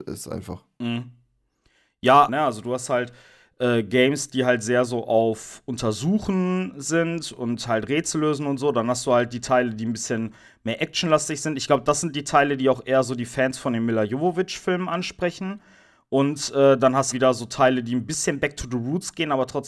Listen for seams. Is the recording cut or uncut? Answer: cut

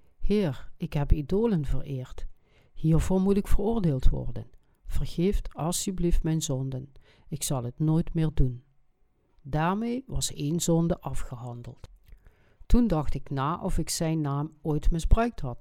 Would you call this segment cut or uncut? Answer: uncut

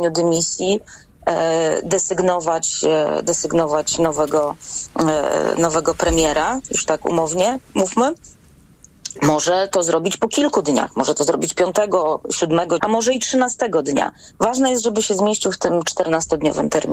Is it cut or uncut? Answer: cut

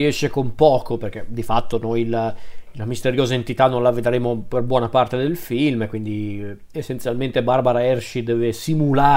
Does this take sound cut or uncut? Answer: uncut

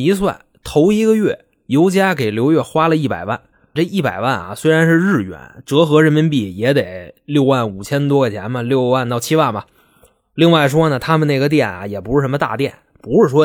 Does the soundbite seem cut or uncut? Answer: cut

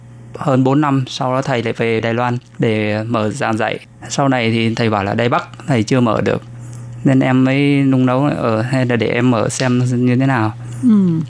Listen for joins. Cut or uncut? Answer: cut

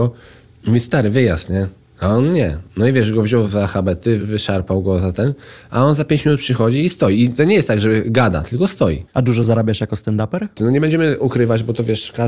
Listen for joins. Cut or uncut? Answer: cut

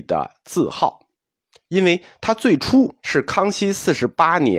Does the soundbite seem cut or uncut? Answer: cut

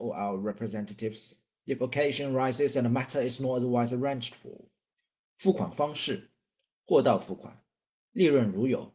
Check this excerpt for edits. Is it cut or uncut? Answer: uncut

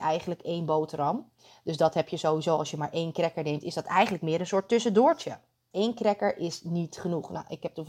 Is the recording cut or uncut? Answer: cut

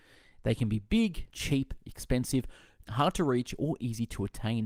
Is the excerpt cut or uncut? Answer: cut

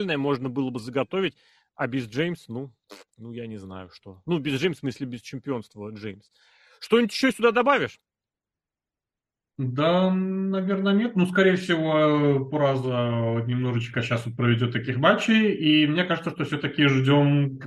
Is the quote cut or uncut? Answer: uncut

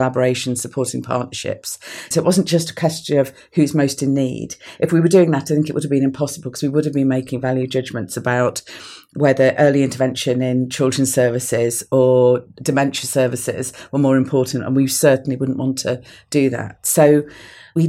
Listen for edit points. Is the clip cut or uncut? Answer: cut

